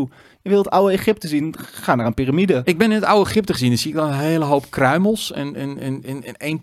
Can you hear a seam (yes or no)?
no